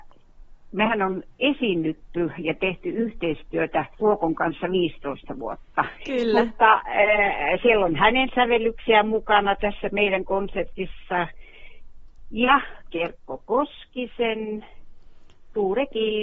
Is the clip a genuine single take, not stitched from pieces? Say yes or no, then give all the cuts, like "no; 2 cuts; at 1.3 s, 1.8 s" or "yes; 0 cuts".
no; 2 cuts; at 3.9 s, 6.0 s